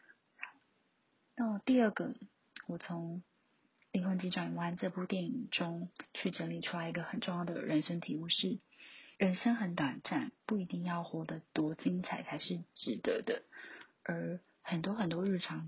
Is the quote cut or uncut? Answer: cut